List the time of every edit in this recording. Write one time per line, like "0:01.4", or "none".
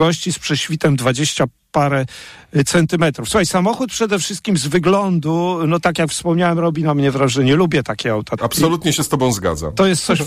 0:08.4